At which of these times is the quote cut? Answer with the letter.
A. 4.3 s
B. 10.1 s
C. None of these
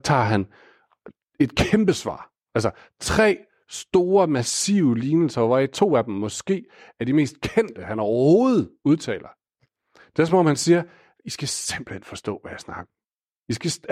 C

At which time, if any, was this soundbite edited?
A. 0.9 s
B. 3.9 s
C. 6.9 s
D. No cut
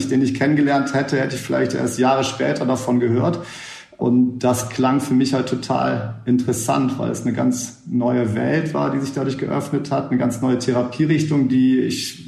D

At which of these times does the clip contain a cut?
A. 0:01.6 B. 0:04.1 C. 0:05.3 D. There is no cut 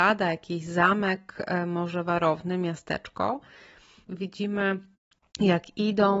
B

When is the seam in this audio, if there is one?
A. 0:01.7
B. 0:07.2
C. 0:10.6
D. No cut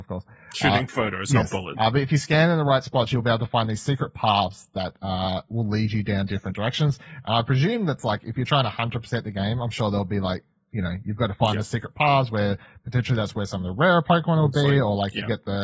A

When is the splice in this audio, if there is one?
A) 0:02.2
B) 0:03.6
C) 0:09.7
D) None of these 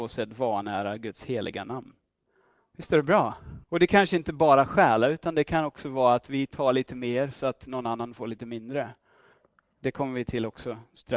B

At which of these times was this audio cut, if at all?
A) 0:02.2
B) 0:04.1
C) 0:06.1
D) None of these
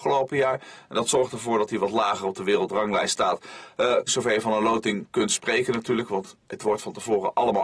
B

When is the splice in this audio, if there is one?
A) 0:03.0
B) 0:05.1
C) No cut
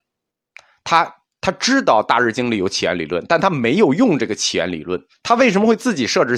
B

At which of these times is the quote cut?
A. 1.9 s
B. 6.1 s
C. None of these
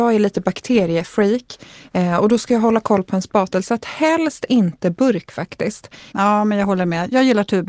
B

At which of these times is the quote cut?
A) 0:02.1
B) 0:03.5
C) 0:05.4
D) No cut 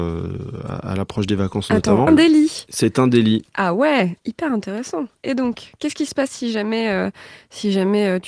A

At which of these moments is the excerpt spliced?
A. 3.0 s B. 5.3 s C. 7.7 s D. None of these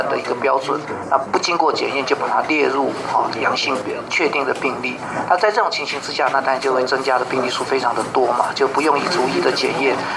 D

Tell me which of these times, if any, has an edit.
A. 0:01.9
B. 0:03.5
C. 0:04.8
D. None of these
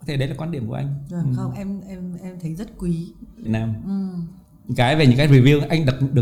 B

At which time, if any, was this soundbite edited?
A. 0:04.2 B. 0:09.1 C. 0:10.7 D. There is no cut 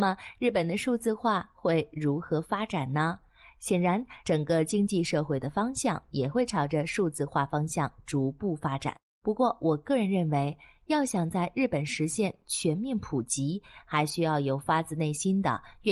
A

